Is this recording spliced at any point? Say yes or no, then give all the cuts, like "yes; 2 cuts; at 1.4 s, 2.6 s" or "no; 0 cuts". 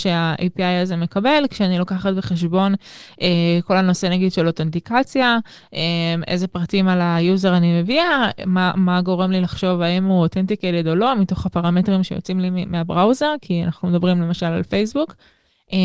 no; 0 cuts